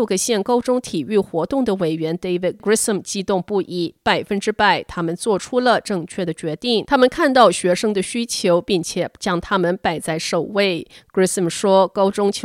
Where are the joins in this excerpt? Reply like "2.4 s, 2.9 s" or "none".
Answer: 6.9 s